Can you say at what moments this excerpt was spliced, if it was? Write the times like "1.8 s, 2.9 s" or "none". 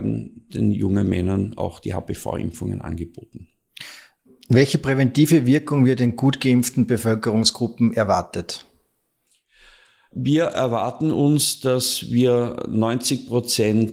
none